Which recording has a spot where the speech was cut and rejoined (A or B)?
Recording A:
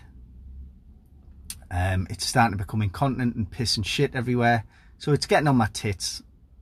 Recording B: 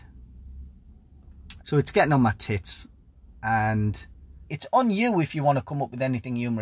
B